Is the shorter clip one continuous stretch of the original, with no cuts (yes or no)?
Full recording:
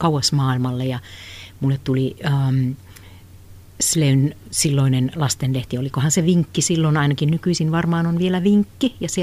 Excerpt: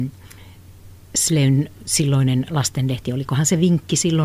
yes